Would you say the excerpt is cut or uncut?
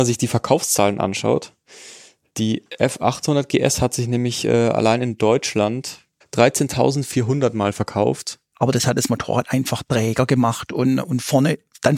cut